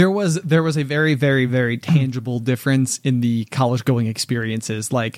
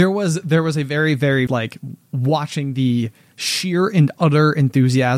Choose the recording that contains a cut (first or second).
second